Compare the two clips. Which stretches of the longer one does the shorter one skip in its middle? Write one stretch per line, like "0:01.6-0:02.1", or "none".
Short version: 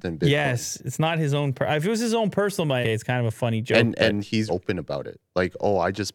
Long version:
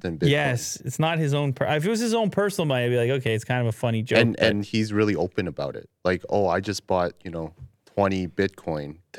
0:02.8-0:03.2
0:04.9-0:05.2